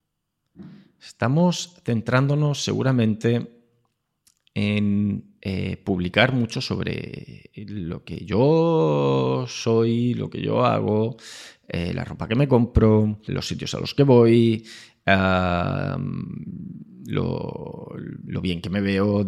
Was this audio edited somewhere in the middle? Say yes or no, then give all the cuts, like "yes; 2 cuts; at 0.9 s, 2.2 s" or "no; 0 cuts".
yes; 1 cut; at 13.3 s